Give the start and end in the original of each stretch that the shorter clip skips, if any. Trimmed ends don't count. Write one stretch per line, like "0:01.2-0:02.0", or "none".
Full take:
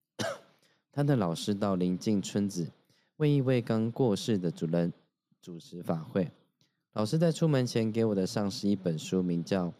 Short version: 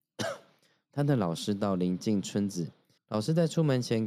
0:03.0-0:06.8

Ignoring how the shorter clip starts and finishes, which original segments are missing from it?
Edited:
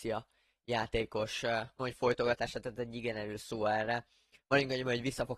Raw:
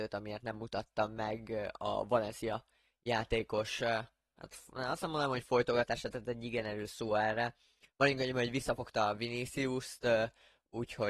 0:04.2-0:05.3

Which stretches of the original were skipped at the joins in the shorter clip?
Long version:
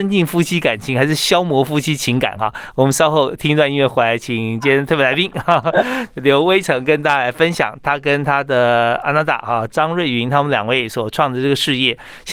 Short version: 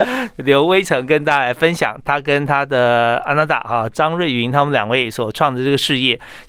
none

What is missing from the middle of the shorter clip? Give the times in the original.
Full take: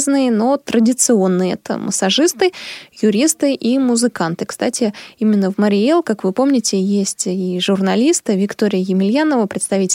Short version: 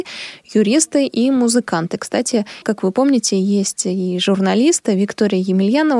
0:05.1-0:06.0

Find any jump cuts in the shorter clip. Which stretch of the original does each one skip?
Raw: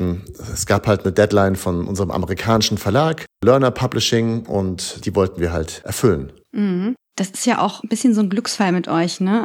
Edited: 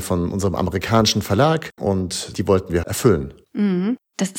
0:03.3-0:04.5
0:05.5-0:05.8

